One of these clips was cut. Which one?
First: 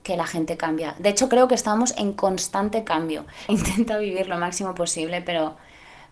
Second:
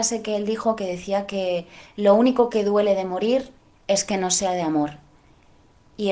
first; 1 cut; at 3.5 s

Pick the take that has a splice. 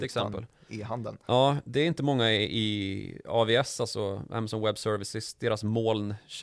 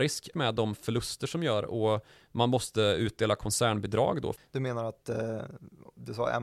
second; 1 cut; at 4.4 s

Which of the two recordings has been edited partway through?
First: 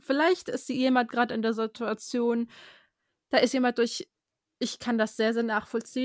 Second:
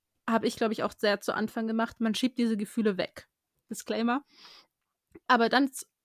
second; 1 cut; at 3.5 s

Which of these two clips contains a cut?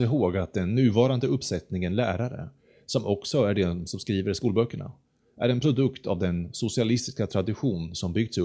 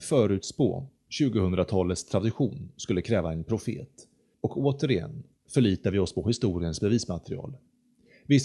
second; 1 cut; at 4.3 s

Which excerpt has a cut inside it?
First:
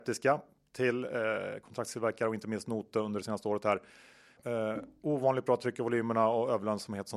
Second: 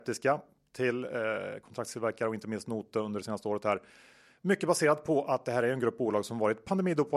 first; 1 cut; at 4.4 s

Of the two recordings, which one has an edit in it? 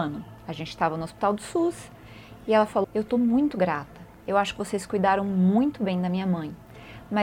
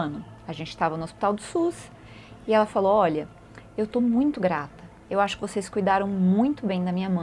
first; 1 cut; at 2.8 s

